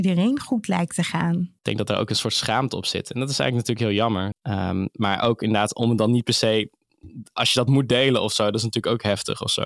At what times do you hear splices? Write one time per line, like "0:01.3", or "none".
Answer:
0:01.6
0:04.3